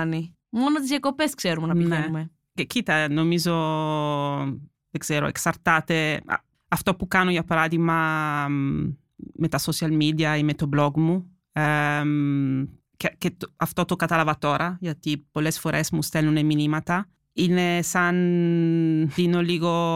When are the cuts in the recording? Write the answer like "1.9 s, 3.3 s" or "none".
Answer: none